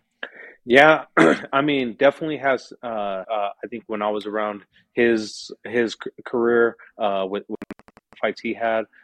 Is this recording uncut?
no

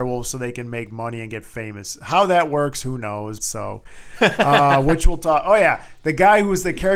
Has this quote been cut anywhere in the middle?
yes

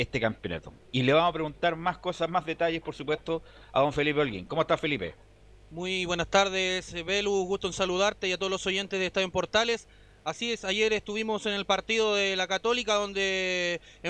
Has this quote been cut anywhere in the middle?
no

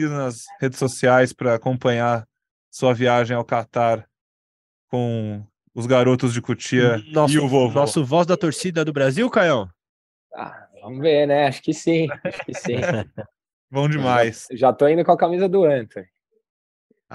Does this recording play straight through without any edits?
yes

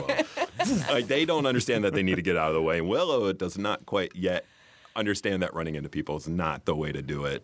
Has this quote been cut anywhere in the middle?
no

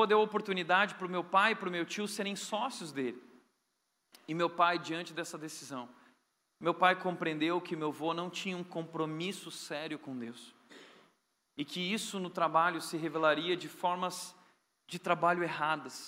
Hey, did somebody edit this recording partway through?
no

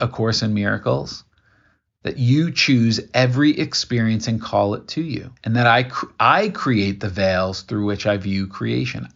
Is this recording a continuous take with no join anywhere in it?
no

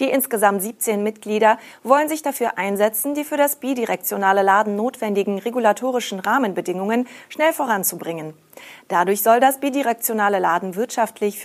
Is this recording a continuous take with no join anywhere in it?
yes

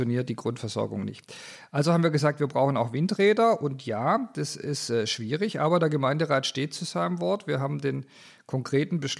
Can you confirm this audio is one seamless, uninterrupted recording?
yes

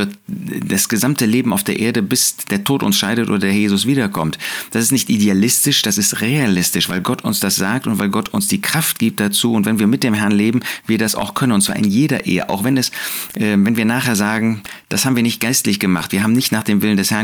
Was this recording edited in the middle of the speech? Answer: no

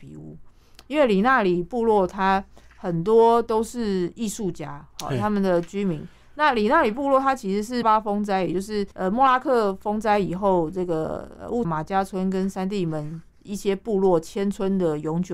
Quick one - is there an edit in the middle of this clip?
yes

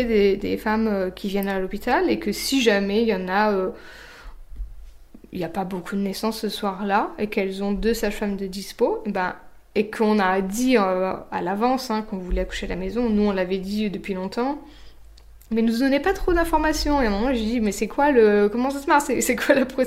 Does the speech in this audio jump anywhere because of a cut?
no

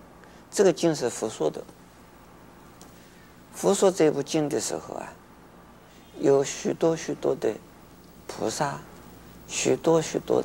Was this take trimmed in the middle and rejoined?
no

